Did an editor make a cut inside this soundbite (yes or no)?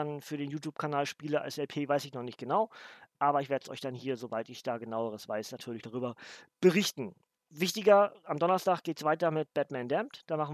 no